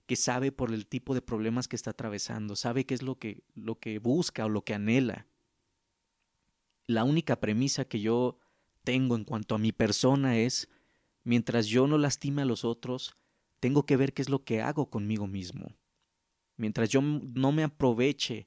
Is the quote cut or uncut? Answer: uncut